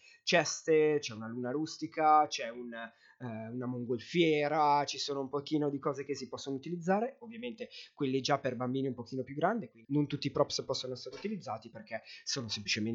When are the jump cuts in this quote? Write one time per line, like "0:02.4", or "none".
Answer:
0:09.8